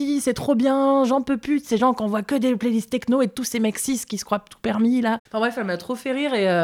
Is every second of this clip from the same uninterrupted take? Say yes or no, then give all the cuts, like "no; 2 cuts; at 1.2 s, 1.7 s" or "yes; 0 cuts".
yes; 0 cuts